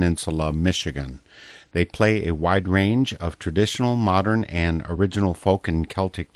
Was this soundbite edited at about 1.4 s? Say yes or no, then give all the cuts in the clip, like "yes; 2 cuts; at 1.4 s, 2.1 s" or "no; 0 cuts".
no; 0 cuts